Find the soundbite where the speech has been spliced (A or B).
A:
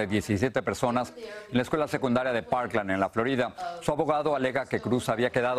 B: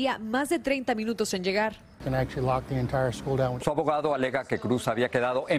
B